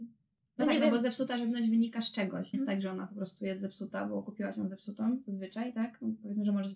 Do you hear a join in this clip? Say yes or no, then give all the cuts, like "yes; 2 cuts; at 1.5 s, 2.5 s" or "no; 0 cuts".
yes; 1 cut; at 2.5 s